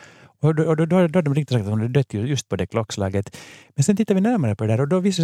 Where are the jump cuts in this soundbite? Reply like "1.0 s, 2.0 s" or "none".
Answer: 2.5 s